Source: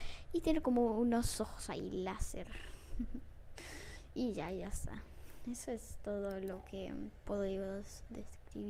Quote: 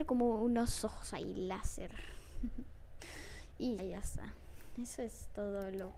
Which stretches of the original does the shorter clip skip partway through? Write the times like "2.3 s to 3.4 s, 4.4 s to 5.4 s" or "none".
4.3 s to 4.5 s